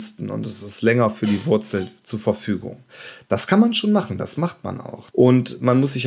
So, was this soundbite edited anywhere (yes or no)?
yes